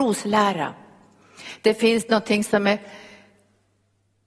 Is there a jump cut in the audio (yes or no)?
no